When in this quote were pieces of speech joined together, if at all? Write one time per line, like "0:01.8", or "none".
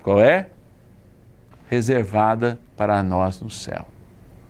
0:01.5
0:02.7

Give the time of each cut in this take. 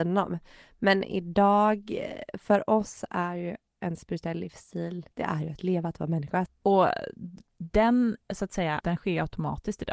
0:06.5
0:08.8

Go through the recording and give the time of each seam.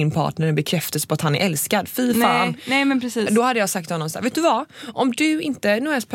none

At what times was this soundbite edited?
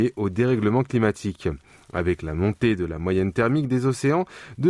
none

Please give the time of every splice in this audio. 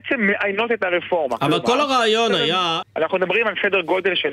0:02.8

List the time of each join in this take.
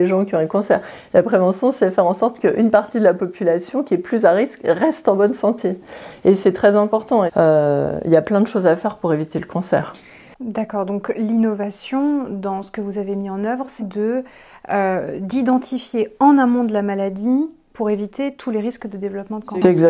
0:07.3
0:10.3
0:13.8

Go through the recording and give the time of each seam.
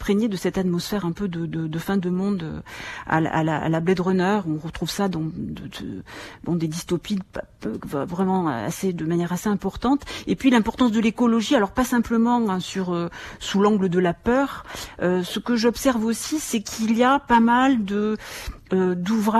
none

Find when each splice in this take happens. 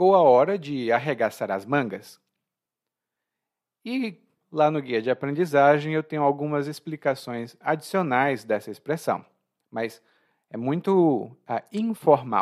0:04.4

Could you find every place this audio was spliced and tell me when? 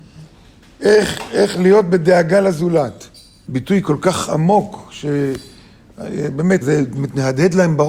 0:03.5
0:06.6

